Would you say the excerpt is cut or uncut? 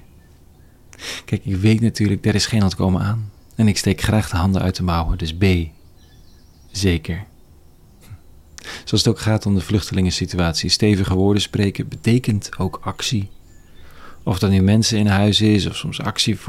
uncut